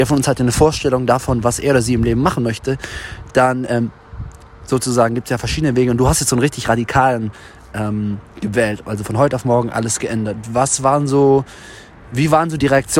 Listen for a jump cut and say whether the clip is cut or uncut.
uncut